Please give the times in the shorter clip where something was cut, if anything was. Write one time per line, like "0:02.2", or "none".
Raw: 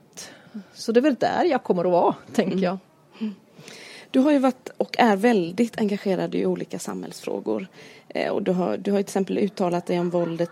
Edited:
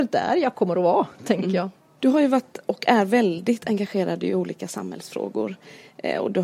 0:02.0